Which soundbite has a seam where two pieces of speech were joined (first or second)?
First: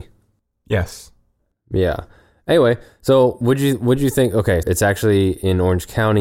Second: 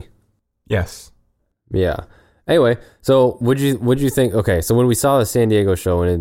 first